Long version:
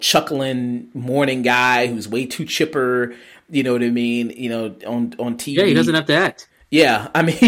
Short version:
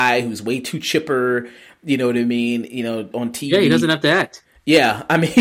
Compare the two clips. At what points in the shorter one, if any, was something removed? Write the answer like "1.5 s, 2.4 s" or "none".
3.1 s

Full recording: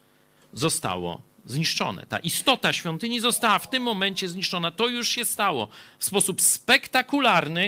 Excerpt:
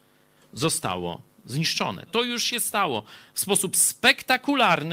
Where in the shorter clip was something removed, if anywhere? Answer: 2.1 s

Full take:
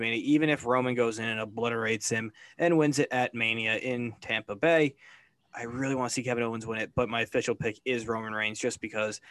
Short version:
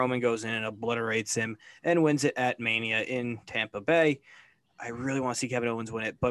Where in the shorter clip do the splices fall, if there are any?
none

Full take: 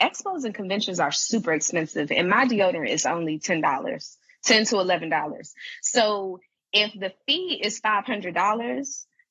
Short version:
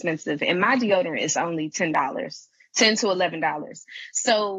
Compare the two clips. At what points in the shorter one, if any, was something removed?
none

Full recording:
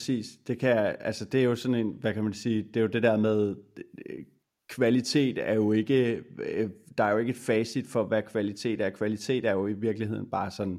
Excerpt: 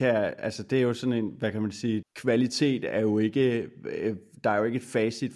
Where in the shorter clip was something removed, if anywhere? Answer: 2.0 s

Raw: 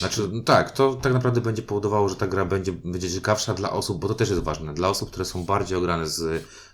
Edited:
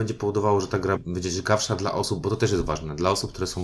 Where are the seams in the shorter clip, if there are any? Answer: 1.0 s

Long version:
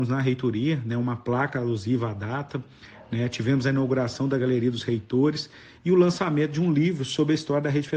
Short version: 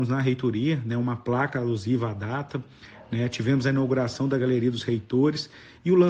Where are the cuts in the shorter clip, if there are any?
none

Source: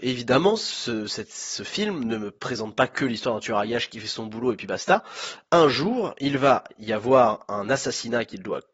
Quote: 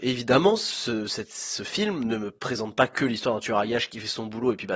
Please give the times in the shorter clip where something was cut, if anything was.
none

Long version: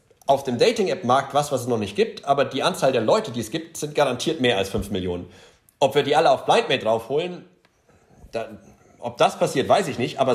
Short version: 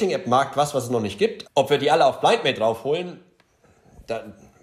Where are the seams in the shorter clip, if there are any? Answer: 1.4 s

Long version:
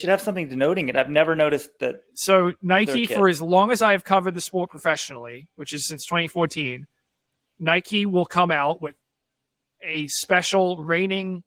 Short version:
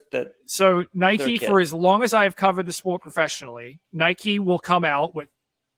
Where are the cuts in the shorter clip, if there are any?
3.8 s

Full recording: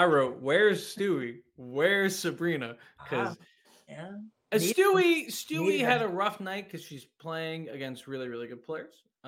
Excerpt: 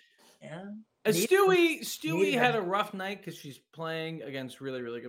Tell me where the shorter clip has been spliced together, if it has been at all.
none

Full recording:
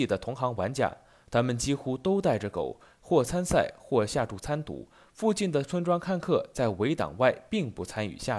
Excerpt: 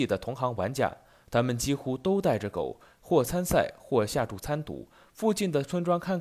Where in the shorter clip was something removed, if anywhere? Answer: none

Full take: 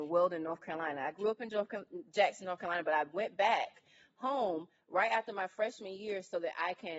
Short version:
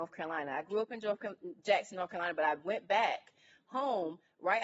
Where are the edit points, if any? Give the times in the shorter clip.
none

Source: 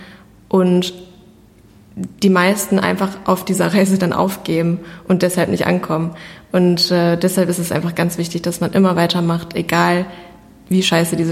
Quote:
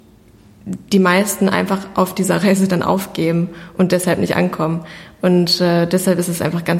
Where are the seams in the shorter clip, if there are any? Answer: none

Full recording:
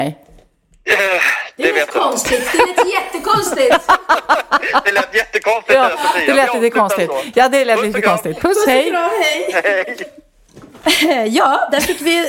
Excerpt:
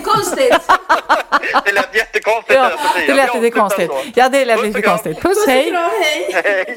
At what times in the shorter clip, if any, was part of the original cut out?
none

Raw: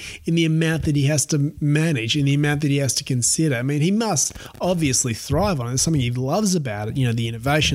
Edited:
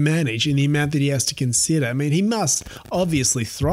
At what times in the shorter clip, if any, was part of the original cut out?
none

